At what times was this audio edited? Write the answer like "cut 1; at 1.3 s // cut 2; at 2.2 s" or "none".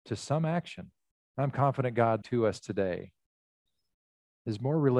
cut 1; at 1.2 s // cut 2; at 2.2 s